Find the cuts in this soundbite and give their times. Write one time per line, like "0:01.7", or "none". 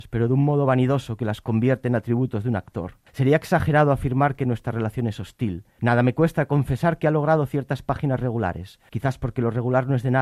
0:03.1
0:05.8
0:08.9